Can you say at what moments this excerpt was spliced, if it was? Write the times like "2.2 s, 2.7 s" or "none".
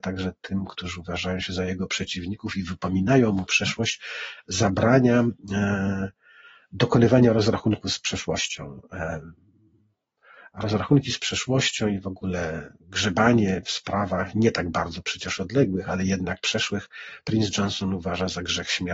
none